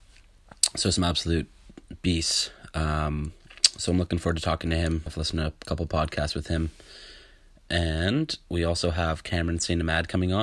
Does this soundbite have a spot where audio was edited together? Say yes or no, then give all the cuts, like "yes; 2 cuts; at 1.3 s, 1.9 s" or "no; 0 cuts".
yes; 1 cut; at 5.1 s